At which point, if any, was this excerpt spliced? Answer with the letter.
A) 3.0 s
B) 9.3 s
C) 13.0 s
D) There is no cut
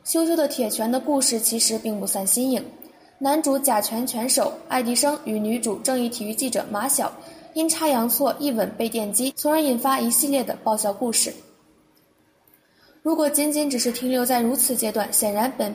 B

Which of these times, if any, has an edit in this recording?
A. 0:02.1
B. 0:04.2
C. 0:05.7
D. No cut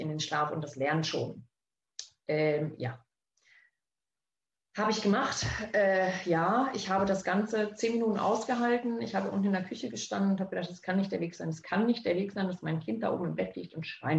D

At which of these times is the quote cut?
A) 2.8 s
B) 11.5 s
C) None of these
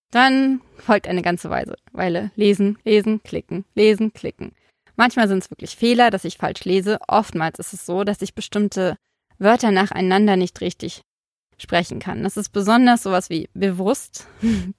A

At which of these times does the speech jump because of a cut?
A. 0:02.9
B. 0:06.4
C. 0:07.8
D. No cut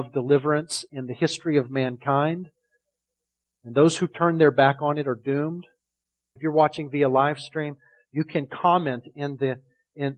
B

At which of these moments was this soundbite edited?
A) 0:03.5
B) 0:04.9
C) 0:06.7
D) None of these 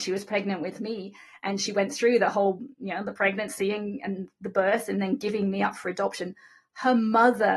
D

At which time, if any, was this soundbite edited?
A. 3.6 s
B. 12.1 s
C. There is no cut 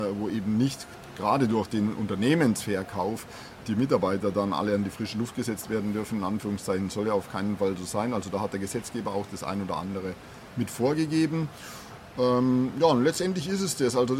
A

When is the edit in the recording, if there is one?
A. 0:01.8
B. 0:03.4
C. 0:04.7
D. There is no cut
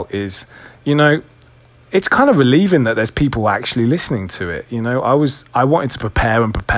D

